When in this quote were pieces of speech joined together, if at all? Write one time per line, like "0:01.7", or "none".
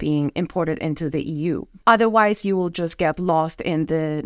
0:01.8